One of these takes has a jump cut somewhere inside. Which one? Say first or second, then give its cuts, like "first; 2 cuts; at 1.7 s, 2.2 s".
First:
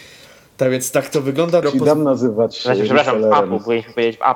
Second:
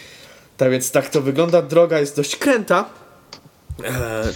first; 1 cut; at 1.6 s